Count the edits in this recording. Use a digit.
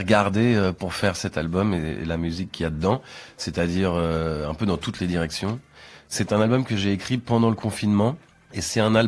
0